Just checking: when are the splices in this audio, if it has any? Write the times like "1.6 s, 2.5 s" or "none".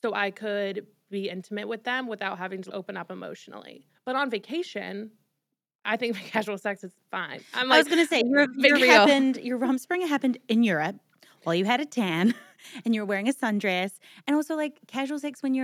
3.9 s, 8.8 s